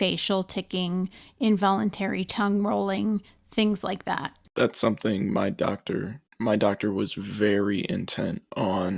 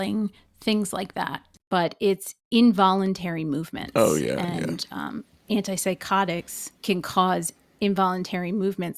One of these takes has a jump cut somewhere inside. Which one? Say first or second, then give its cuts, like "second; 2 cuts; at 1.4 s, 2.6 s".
second; 1 cut; at 1.6 s